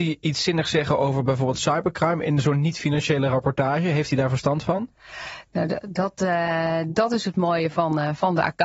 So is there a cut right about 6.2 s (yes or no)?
no